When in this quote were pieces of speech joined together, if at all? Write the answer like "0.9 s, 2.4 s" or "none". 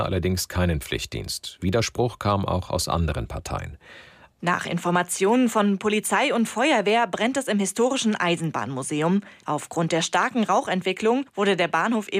4.3 s, 9.4 s